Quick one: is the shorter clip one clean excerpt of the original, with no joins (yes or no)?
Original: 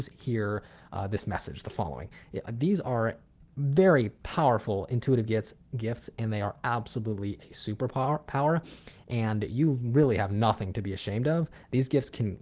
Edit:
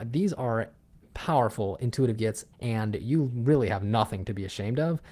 no